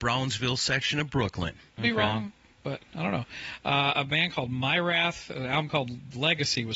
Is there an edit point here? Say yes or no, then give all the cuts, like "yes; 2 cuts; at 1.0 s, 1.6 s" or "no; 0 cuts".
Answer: yes; 1 cut; at 1.8 s